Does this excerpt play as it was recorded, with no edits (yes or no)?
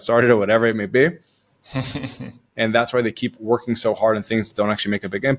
yes